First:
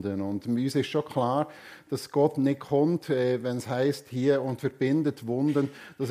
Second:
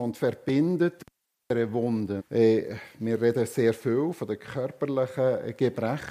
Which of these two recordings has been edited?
second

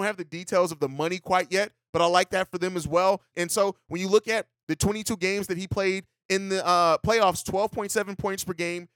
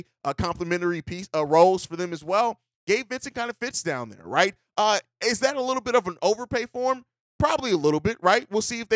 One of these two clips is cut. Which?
first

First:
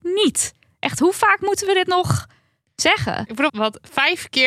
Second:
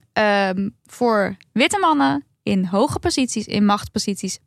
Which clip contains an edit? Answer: first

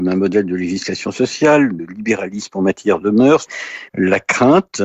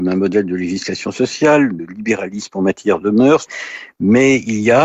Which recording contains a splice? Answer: first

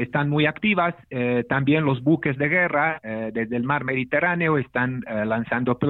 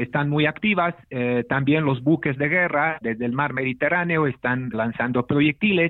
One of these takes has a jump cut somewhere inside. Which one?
second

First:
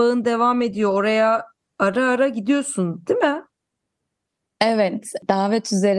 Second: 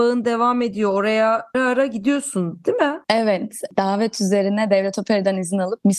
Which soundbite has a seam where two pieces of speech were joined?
second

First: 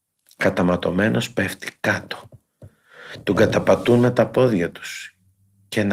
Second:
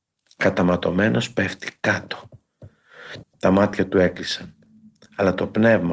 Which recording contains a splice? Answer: second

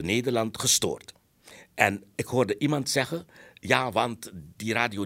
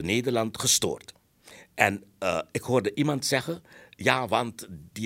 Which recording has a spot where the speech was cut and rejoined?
first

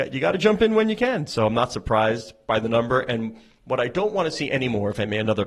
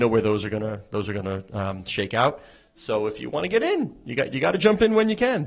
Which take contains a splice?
second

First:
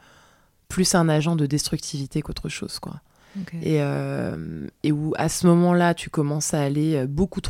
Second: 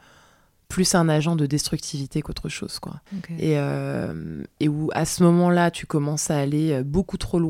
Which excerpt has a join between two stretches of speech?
second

